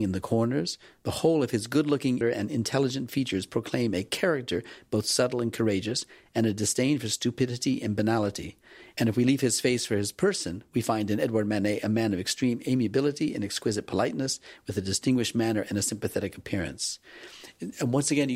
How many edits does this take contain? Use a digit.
1